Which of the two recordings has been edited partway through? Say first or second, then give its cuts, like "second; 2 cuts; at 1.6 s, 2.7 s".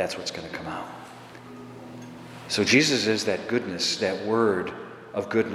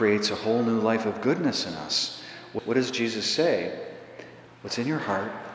second; 2 cuts; at 2.6 s, 4.5 s